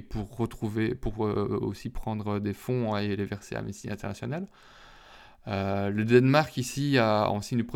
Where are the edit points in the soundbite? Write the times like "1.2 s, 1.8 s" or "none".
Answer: none

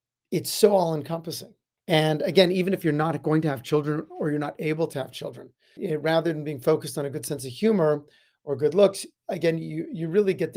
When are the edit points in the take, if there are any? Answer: 1.8 s, 5.8 s

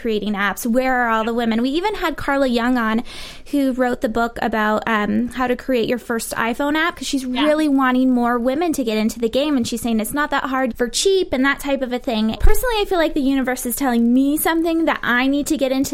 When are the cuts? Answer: 10.7 s, 12.4 s

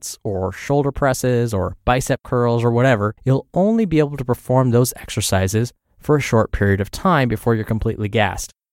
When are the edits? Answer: 3.2 s

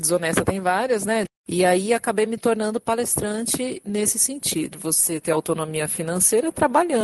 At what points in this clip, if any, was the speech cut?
1.3 s, 4.7 s

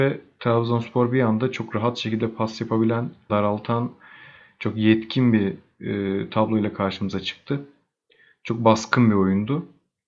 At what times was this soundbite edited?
3.3 s

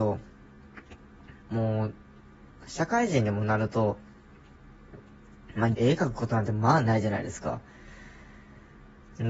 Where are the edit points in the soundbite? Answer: 1.4 s, 5.7 s

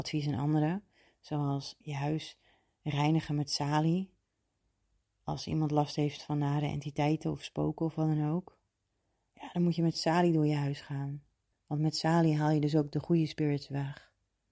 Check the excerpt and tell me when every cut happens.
1.8 s, 11.5 s

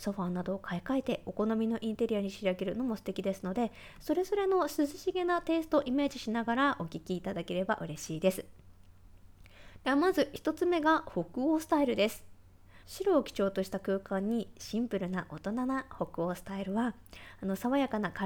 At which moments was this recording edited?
12.8 s

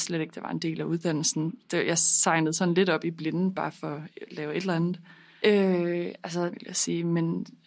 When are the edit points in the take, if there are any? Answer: 5.4 s, 6.5 s

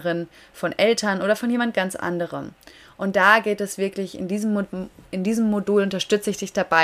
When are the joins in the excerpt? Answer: none

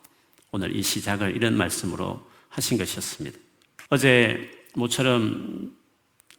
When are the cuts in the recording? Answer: 3.9 s

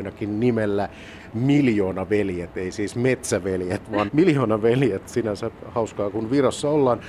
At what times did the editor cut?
4.1 s

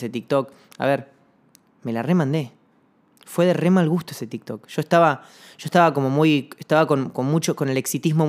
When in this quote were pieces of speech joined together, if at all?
none

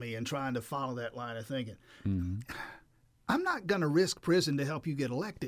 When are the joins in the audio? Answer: none

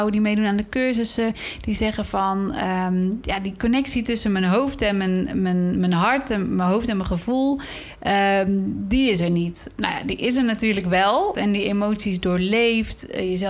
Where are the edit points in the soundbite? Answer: 11.3 s

